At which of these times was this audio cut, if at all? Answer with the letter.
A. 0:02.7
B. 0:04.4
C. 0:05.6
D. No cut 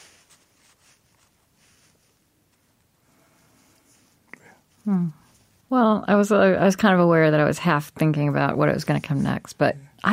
C